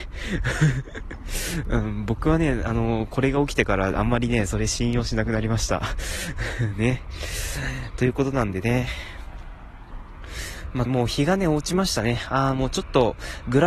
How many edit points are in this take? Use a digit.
1